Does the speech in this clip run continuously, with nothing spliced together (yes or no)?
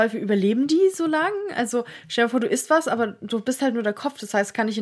yes